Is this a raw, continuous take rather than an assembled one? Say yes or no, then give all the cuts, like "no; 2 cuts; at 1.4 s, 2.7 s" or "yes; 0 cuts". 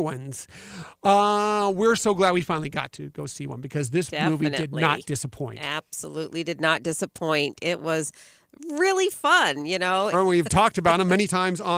no; 1 cut; at 10.1 s